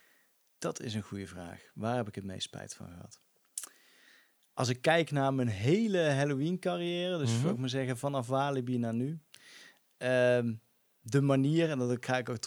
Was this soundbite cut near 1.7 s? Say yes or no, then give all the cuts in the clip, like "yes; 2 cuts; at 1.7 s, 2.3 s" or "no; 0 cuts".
no; 0 cuts